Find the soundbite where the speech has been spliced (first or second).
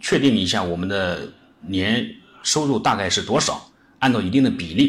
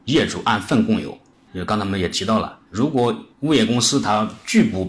second